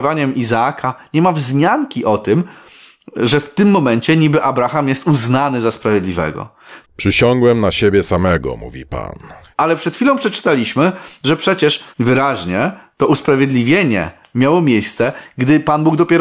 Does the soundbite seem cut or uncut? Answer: cut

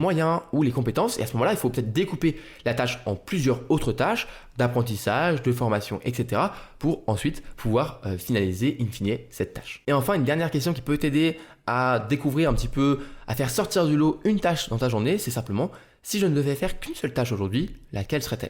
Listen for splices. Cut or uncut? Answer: uncut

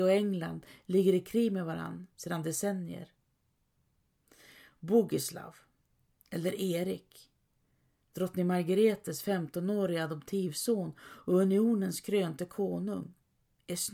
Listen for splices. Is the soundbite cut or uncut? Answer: uncut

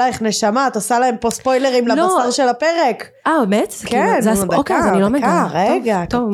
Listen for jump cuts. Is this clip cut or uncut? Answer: uncut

